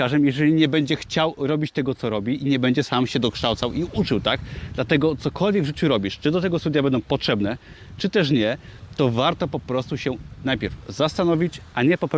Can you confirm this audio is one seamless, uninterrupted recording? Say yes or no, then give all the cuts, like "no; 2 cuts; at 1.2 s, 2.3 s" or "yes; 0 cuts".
yes; 0 cuts